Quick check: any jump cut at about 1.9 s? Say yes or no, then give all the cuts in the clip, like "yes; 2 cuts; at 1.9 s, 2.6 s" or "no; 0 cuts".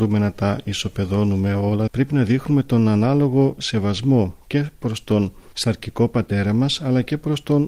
yes; 1 cut; at 1.9 s